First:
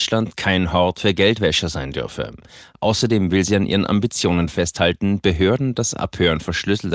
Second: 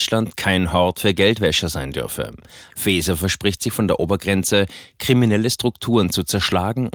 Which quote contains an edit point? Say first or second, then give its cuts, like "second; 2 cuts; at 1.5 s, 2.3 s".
second; 1 cut; at 2.7 s